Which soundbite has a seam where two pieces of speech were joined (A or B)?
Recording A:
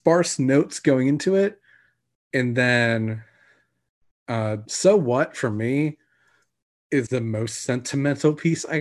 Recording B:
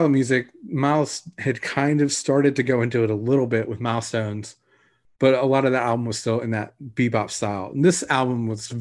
A